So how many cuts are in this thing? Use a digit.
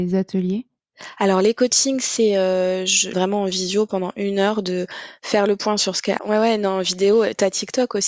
2